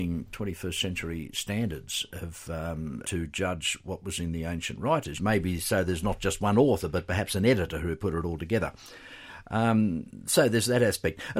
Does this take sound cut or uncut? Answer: cut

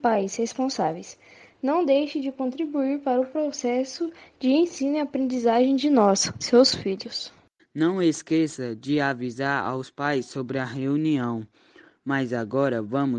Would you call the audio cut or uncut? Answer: cut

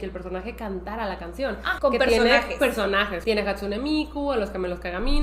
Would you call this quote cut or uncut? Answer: cut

